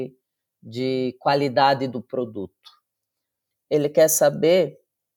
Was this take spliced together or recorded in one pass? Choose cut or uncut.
cut